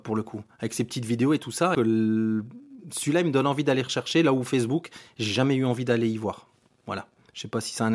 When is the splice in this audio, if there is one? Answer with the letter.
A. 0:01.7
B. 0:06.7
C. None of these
A